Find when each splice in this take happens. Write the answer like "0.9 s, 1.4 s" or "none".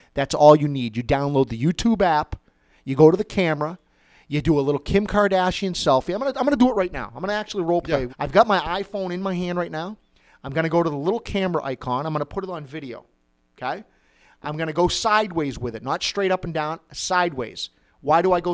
8.1 s